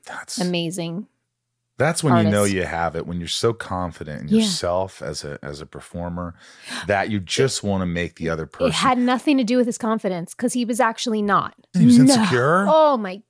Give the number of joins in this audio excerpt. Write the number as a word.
one